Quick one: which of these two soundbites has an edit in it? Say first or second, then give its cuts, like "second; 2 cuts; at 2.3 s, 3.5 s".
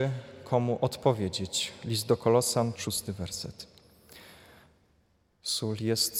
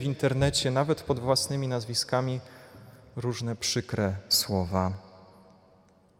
first; 1 cut; at 2.8 s